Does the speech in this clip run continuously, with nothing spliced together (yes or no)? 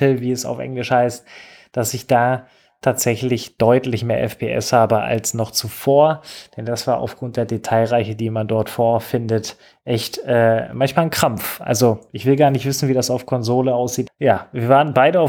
no